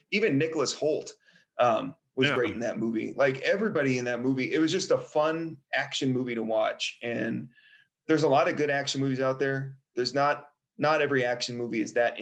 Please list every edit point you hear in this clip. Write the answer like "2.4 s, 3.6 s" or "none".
none